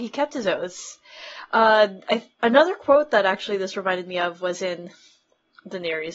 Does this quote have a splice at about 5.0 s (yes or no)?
no